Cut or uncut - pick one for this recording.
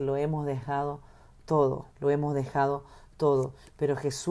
cut